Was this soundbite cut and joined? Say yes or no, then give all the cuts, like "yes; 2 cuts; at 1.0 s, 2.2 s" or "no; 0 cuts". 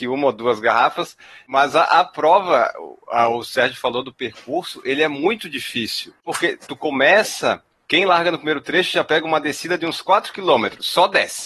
no; 0 cuts